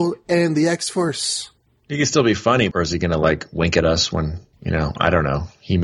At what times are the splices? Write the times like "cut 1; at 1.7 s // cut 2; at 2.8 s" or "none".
cut 1; at 2.7 s // cut 2; at 4.5 s